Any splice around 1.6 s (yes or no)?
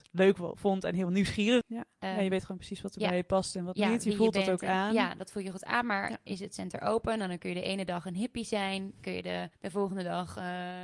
yes